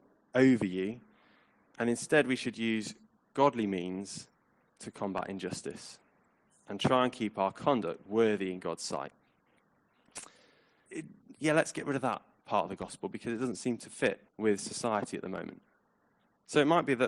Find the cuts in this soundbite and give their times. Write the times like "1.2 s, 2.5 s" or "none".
10.9 s, 14.3 s